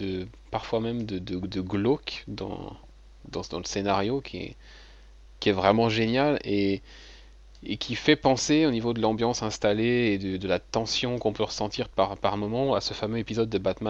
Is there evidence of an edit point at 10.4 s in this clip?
no; 0 cuts

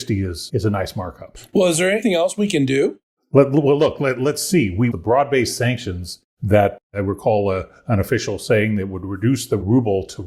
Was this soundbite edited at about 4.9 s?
yes; 1 cut; at 4.9 s

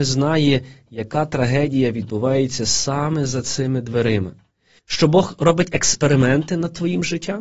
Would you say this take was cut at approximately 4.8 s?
yes; 1 cut; at 4.8 s

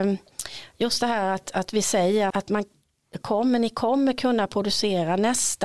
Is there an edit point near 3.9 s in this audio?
no; 1 cut; at 2.3 s

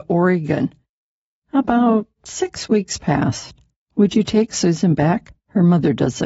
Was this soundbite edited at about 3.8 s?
yes; 1 cut; at 3.8 s

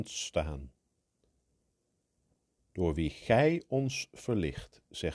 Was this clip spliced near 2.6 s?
yes; 1 cut; at 2.6 s

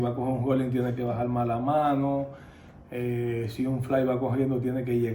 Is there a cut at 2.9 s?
no; 0 cuts

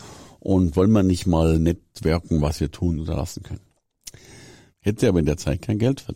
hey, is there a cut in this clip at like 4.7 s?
yes; 1 cut; at 4.7 s

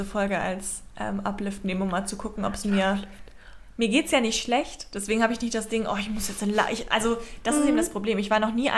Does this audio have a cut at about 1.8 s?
no; 0 cuts

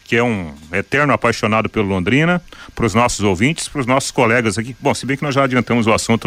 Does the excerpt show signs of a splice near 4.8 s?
no; 0 cuts

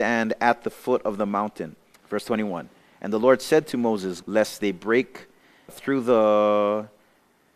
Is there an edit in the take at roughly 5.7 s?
yes; 3 cuts; at 1.9 s, 4.2 s, 5.7 s

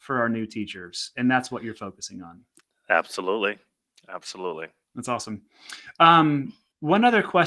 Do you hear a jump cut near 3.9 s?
no; 0 cuts

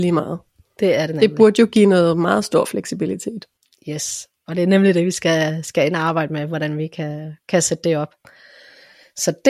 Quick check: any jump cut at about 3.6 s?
no; 0 cuts

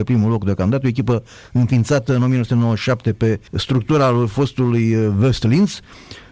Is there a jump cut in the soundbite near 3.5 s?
yes; 1 cut; at 3.5 s

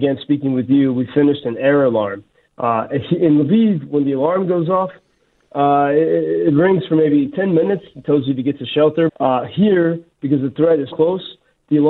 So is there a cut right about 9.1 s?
yes; 2 cuts; at 9.1 s, 10.9 s

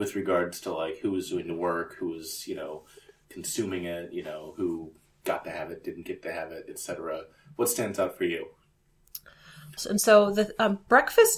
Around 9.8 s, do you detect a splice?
yes; 1 cut; at 9.8 s

